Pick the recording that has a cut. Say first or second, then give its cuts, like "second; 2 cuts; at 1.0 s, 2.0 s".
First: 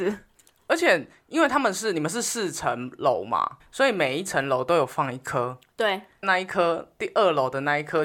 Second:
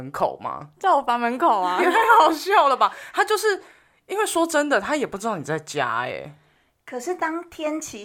first; 2 cuts; at 3.6 s, 6.2 s